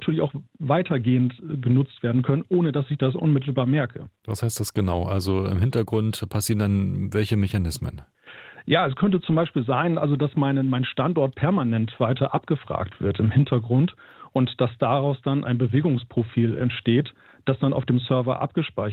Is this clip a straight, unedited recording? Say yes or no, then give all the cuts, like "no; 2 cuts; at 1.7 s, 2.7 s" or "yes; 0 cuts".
yes; 0 cuts